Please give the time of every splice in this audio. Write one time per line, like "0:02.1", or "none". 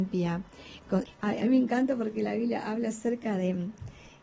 0:01.1